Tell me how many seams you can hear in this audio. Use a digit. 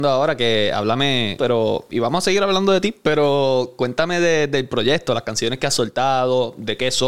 1